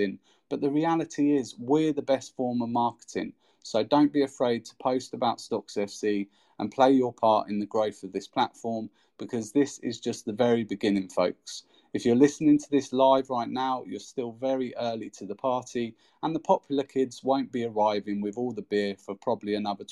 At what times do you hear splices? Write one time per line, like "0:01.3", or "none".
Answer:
0:03.5